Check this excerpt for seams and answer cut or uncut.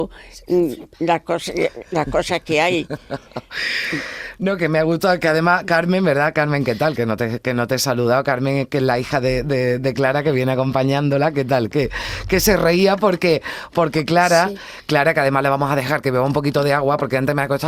uncut